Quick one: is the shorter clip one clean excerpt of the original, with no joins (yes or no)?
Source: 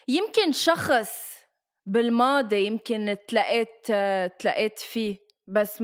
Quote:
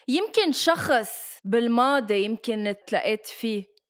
no